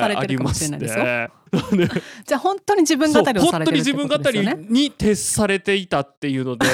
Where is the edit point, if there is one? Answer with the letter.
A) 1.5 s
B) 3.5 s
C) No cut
A